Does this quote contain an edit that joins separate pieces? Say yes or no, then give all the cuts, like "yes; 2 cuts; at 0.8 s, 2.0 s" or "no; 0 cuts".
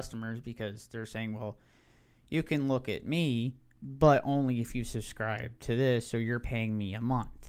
no; 0 cuts